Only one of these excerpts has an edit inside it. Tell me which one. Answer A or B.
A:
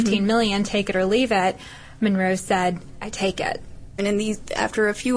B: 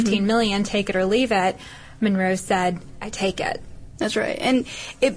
A